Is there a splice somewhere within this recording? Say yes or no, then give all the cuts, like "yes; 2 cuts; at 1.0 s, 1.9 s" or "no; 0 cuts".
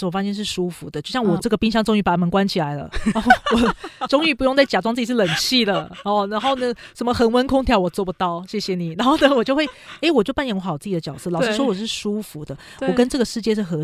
no; 0 cuts